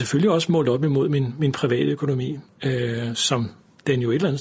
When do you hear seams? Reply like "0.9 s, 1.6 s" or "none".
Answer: none